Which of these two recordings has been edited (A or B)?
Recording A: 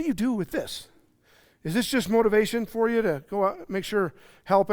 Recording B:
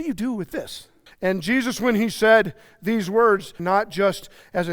B